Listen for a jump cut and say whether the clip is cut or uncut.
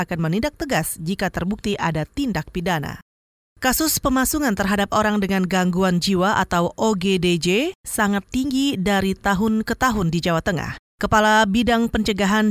cut